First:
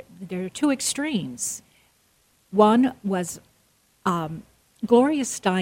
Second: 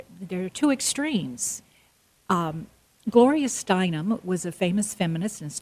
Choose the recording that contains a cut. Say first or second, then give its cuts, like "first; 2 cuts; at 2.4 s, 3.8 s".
second; 1 cut; at 2.2 s